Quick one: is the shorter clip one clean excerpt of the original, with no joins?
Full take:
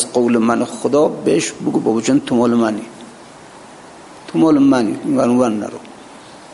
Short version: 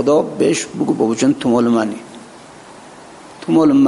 yes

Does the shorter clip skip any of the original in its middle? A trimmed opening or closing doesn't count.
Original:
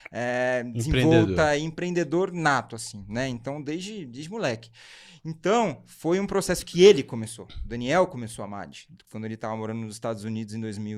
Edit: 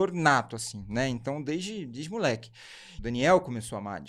yes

